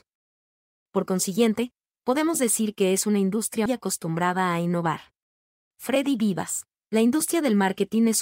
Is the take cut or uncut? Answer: cut